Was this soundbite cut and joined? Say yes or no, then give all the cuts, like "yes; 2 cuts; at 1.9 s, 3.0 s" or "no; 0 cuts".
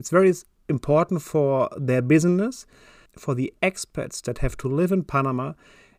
yes; 1 cut; at 3.1 s